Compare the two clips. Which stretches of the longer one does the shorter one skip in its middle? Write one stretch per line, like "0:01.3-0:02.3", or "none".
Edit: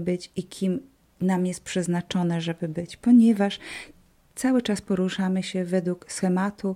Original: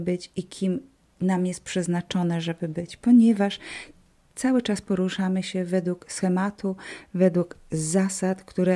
none